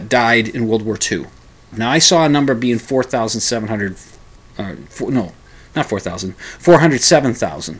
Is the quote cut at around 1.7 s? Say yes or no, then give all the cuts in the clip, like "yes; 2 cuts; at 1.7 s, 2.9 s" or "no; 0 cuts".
yes; 1 cut; at 1.7 s